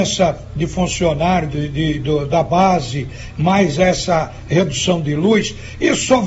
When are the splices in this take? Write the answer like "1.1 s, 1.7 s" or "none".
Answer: none